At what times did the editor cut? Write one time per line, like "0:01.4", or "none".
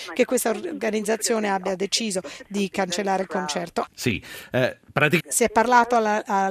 0:03.9
0:05.2